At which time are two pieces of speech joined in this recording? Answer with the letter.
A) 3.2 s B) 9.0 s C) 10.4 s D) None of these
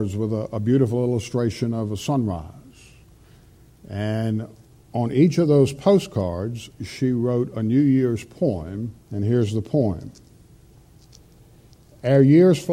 B